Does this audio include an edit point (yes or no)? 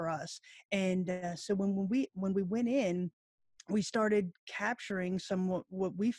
no